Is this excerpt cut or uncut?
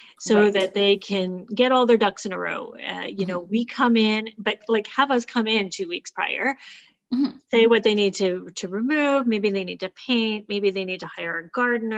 uncut